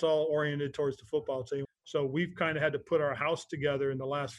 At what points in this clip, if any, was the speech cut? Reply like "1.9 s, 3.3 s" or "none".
1.7 s